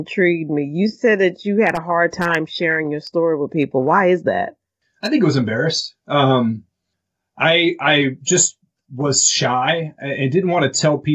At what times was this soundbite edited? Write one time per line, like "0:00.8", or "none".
none

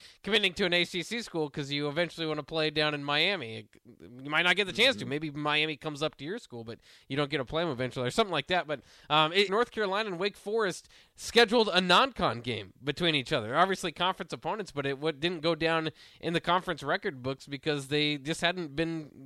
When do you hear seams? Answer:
0:09.5

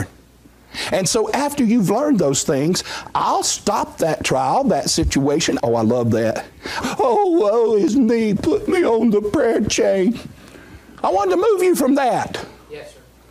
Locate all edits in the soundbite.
0:05.6
0:06.8
0:08.4

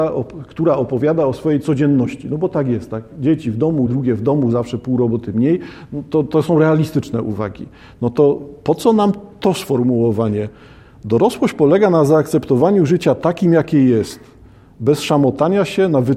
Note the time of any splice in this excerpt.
0:03.9

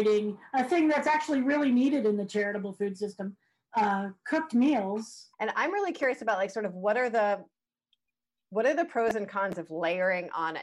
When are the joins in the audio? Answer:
0:05.3

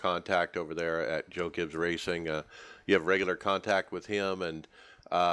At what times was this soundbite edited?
none

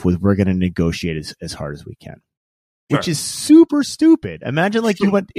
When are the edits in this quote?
0:02.9

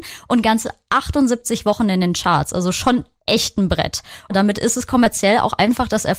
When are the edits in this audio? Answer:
none

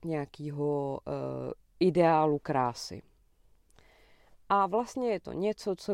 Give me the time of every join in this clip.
none

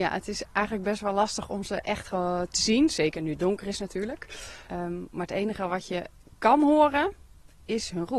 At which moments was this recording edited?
0:04.7

